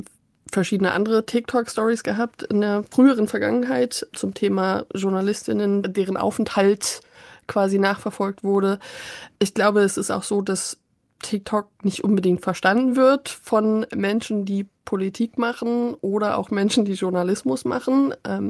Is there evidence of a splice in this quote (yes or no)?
no